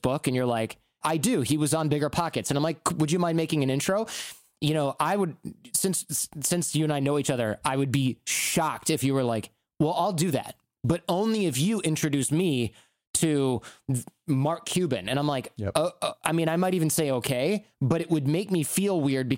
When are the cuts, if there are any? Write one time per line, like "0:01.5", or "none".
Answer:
0:01.0